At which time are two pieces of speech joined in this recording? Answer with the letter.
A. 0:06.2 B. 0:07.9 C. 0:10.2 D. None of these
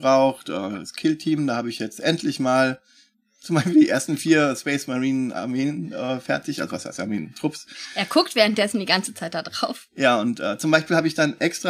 D